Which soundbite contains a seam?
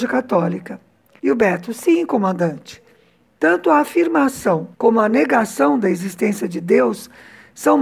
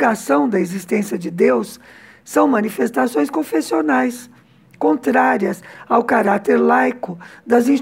first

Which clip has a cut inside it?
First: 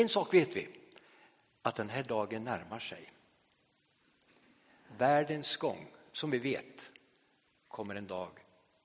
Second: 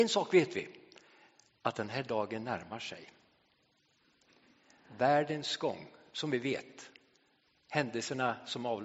first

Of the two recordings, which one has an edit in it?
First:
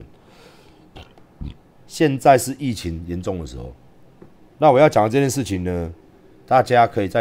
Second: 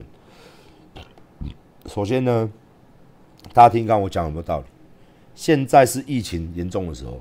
first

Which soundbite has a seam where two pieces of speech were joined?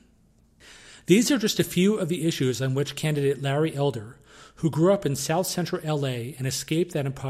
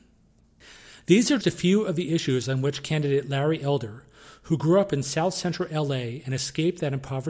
second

